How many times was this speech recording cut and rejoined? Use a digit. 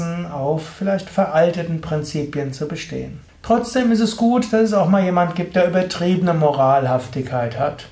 1